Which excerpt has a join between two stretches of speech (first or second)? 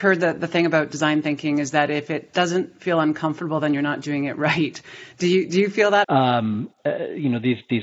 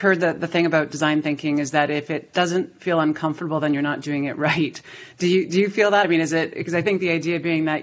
first